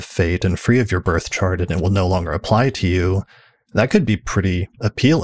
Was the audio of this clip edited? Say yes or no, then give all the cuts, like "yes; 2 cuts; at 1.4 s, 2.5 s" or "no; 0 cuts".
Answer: no; 0 cuts